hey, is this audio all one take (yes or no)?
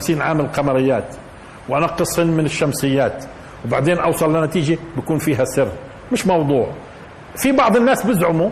yes